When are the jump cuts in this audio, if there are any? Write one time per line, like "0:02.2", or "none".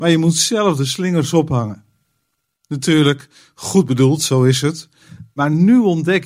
none